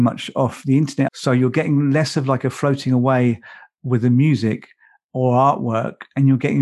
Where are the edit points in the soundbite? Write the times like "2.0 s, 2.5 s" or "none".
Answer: 1.1 s